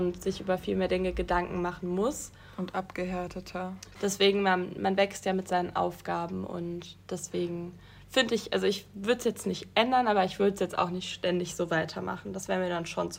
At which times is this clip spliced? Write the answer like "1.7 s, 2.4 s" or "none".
4.0 s